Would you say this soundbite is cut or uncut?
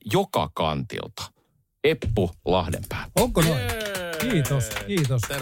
uncut